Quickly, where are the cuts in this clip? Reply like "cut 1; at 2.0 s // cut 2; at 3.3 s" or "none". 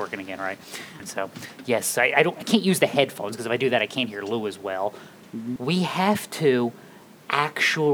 cut 1; at 1.0 s // cut 2; at 5.6 s